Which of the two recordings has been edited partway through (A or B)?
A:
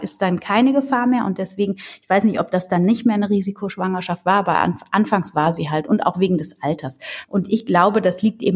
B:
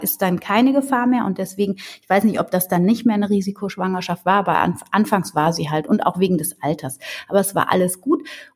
A